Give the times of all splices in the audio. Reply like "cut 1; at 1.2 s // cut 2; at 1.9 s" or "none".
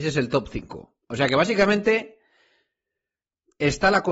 none